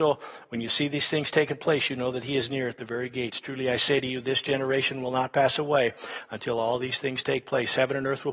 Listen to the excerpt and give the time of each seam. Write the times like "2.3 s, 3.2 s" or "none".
none